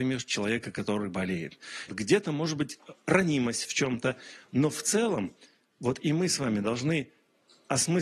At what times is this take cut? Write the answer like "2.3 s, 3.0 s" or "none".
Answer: 1.9 s